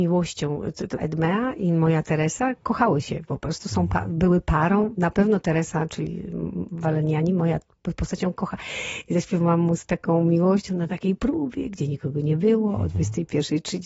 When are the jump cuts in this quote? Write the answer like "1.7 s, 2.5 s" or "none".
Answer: 1.0 s

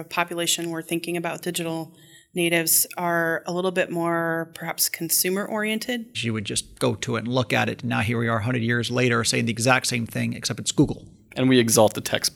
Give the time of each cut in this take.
6.1 s

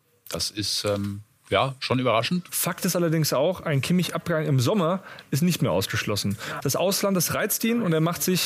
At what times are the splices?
2.5 s, 6.6 s

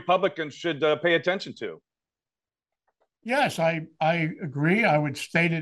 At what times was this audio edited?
none

